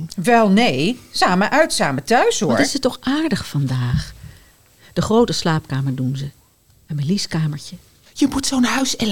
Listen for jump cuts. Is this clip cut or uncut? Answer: cut